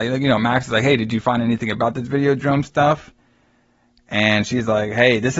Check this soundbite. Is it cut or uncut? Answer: uncut